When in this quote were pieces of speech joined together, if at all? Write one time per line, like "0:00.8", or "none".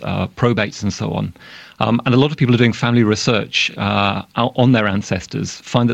none